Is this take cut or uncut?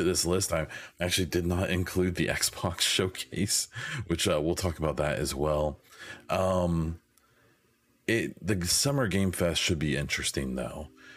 uncut